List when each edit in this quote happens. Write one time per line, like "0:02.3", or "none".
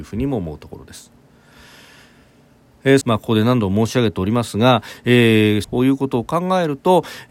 0:03.0
0:05.6